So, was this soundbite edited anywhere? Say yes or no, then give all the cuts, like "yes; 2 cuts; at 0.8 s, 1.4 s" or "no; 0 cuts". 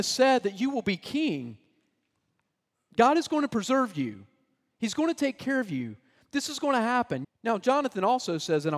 yes; 1 cut; at 7.2 s